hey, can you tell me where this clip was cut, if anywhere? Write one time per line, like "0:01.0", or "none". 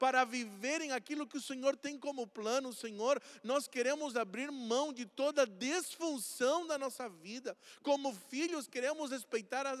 none